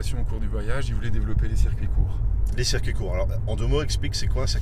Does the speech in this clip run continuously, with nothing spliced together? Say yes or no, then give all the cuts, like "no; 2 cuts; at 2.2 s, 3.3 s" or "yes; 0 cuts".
yes; 0 cuts